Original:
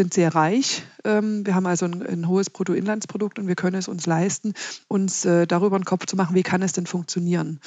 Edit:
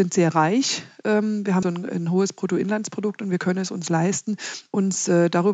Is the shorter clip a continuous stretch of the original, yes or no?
no